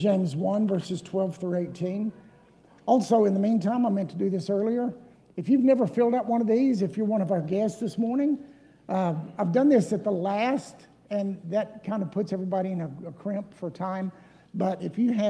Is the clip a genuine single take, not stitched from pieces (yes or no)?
yes